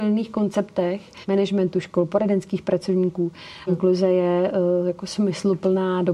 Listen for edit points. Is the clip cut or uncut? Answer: cut